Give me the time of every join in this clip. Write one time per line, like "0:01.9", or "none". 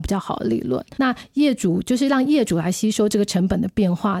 0:00.9